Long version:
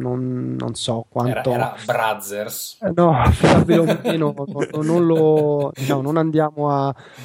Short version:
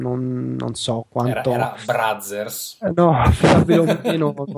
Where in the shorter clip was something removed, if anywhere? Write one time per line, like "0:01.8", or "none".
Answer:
none